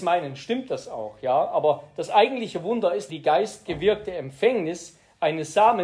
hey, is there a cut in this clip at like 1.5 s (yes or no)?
no